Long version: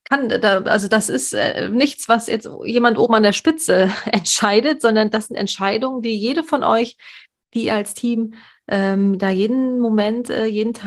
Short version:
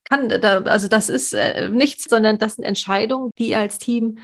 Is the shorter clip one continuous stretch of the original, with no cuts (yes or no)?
no